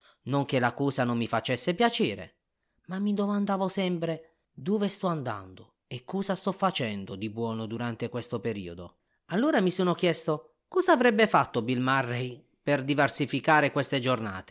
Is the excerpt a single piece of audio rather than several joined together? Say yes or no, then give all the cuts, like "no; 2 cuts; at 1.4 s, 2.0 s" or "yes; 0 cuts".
no; 1 cut; at 4.4 s